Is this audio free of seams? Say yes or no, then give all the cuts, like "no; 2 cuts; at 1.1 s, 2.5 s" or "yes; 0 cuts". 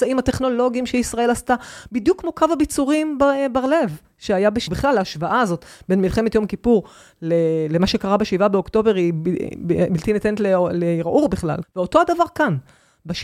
no; 2 cuts; at 4.7 s, 11.6 s